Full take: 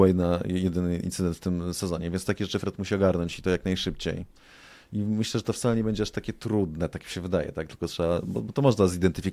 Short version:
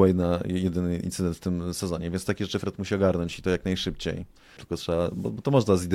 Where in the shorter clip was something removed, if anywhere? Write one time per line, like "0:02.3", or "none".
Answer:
0:04.6